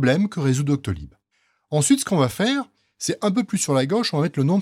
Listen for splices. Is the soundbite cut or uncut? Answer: uncut